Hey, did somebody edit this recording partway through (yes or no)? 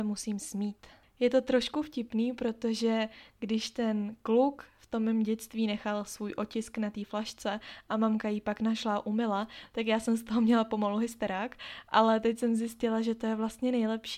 no